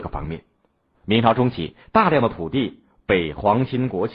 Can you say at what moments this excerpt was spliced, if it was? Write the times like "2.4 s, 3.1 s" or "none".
0.9 s